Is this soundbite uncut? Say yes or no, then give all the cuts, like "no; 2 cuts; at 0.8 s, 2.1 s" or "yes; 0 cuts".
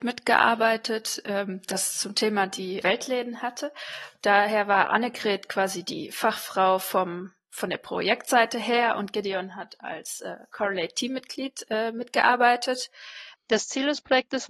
no; 2 cuts; at 2.8 s, 13.3 s